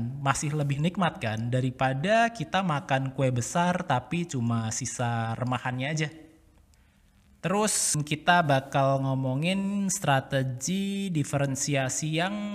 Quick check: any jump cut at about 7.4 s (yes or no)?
no